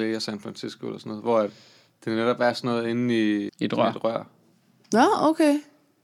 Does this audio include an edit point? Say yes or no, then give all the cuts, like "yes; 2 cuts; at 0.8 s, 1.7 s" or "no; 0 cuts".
yes; 1 cut; at 3.5 s